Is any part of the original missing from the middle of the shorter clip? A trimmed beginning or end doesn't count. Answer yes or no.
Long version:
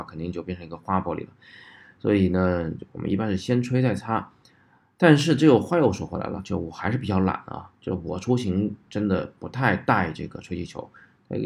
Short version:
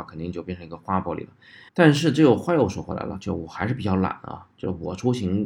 yes